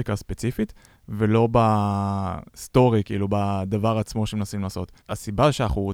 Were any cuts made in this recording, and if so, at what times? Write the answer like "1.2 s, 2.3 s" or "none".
5.0 s

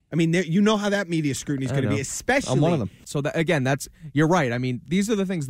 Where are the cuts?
3.0 s

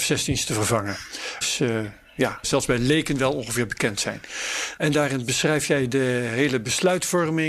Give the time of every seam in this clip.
1.4 s, 2.4 s, 4.8 s

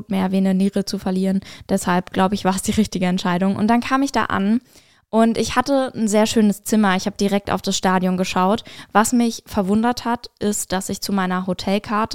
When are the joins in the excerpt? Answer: none

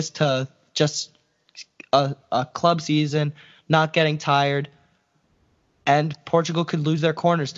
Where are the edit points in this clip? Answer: none

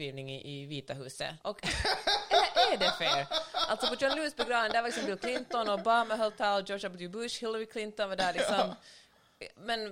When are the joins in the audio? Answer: 1.4 s

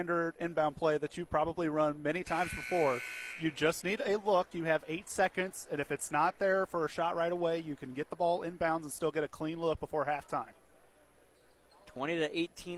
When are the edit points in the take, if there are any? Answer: none

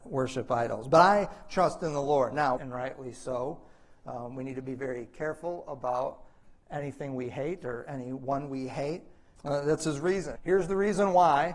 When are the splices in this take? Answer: 2.6 s, 9.3 s, 10.4 s

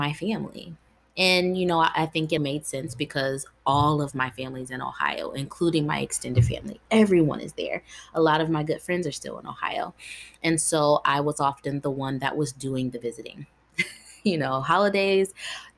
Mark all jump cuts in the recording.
2.4 s

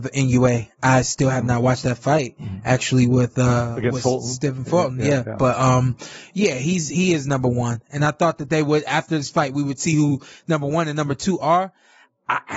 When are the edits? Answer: none

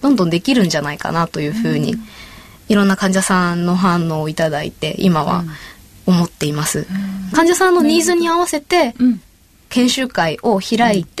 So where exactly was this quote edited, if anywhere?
7.3 s

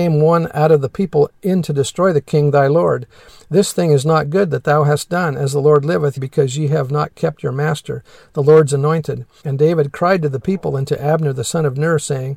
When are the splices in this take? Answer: 6.2 s, 9.4 s

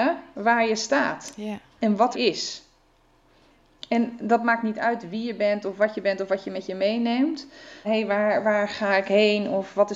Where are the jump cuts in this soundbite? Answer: 2.1 s, 7.8 s

